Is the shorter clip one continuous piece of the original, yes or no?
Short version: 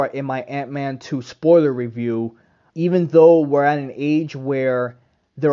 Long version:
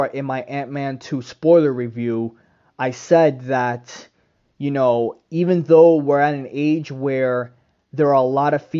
no